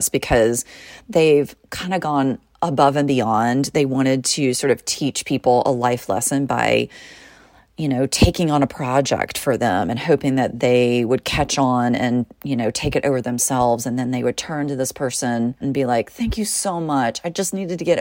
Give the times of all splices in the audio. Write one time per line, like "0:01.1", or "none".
0:15.6